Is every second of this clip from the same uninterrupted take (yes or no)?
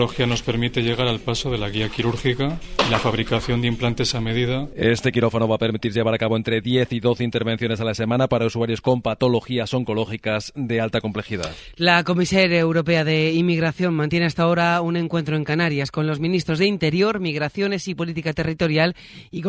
yes